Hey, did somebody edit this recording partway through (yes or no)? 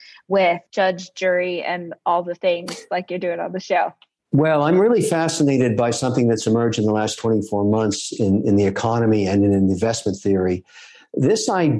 no